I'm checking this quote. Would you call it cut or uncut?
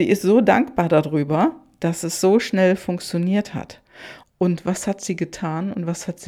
cut